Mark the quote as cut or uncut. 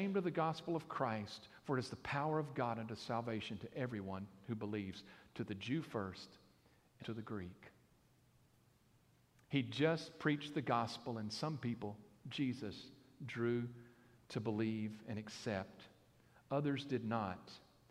cut